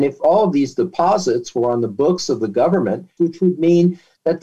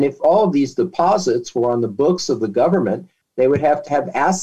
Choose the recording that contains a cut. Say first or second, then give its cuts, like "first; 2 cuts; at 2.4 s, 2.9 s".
first; 1 cut; at 3.2 s